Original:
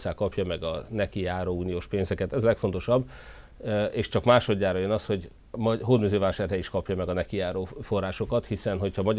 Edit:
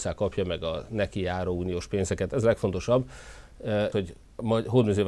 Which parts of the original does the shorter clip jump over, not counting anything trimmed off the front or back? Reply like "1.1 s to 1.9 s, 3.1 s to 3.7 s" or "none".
3.9 s to 5.1 s